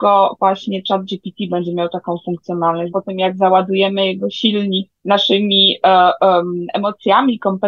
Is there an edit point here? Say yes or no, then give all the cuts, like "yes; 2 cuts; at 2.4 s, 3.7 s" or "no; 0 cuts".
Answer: yes; 2 cuts; at 2.9 s, 5.0 s